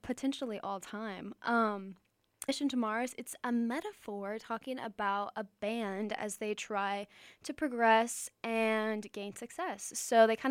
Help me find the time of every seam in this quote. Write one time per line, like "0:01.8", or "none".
0:02.5